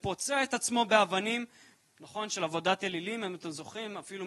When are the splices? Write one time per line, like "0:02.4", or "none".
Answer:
0:01.9